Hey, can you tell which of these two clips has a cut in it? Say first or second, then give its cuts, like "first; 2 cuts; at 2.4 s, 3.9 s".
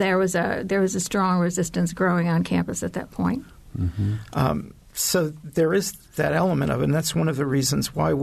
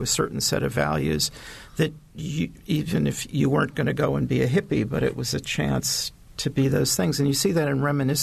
first; 1 cut; at 3.7 s